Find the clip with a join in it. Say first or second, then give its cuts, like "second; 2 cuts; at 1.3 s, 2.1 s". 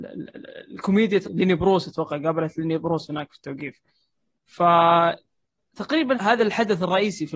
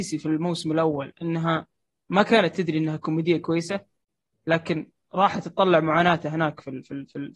first; 2 cuts; at 1.2 s, 6.1 s